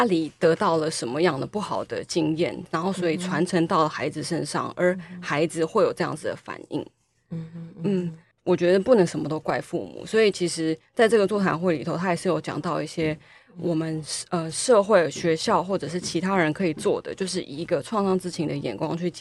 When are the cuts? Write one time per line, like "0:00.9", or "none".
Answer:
none